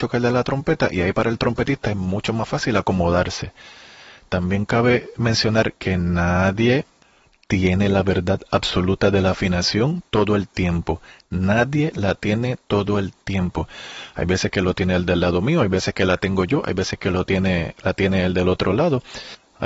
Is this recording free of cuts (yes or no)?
yes